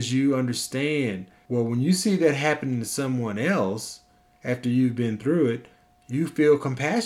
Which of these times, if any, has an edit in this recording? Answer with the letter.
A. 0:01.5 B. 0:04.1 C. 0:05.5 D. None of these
A